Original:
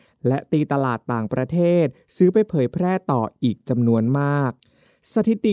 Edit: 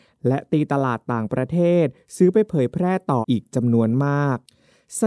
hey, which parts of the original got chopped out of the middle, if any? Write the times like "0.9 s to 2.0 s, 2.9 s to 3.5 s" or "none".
3.2 s to 3.3 s